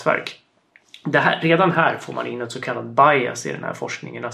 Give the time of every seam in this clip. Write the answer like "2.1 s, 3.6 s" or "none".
none